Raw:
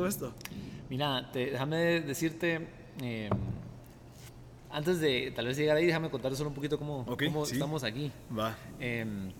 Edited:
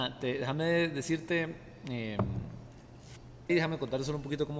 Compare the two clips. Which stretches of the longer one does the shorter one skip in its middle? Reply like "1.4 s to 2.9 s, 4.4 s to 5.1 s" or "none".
4.6 s to 5.8 s